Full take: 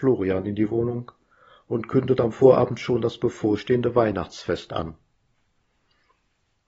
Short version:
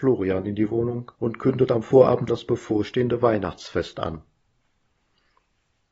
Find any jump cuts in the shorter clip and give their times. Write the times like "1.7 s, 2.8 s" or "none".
1.1 s, 2.3 s